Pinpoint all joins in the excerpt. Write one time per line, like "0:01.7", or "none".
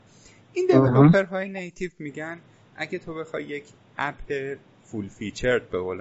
none